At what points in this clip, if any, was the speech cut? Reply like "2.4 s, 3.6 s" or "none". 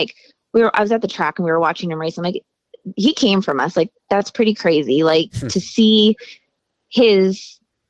none